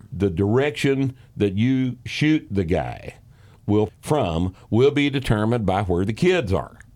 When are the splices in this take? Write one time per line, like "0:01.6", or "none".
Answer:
0:03.9